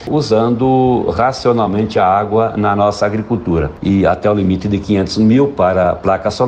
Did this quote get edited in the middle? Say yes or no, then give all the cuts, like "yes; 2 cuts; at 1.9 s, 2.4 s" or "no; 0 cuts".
yes; 1 cut; at 3.8 s